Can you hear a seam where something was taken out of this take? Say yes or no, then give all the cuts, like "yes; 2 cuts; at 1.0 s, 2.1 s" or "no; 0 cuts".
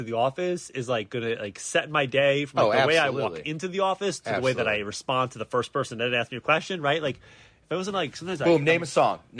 no; 0 cuts